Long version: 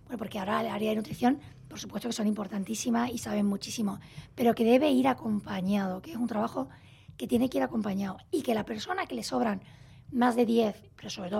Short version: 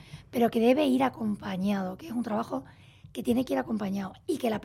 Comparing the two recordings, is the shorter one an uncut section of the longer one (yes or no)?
yes